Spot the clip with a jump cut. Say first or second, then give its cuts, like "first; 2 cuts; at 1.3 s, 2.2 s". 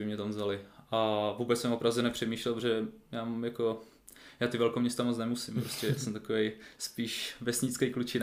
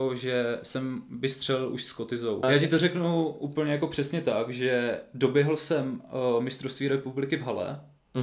second; 1 cut; at 2.4 s